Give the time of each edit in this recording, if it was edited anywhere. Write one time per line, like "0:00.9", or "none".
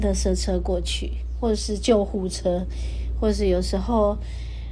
none